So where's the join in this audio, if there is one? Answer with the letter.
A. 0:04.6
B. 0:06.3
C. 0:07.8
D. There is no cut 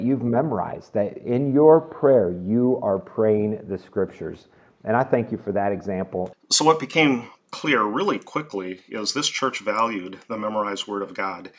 B